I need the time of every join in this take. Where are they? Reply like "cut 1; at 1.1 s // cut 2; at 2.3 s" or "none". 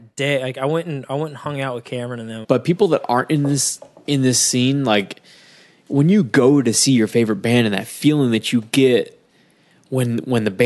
cut 1; at 2.4 s